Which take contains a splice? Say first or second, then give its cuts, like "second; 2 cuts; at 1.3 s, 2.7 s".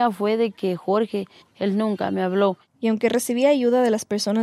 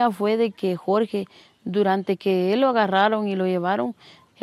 first; 1 cut; at 1.4 s